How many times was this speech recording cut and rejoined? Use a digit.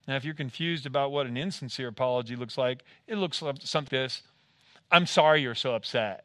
1